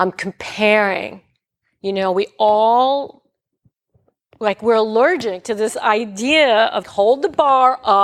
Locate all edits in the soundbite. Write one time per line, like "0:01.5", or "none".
0:06.8